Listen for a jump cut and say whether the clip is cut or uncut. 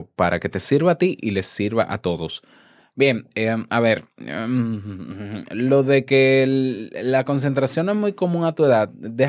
uncut